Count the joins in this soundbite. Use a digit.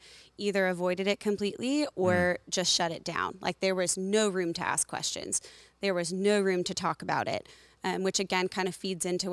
0